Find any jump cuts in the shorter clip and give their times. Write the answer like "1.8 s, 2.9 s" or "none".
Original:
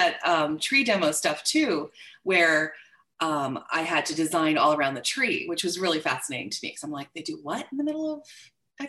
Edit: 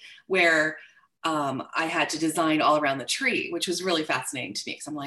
none